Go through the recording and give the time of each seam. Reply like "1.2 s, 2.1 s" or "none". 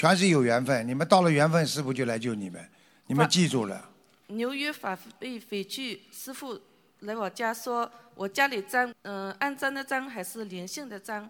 8.9 s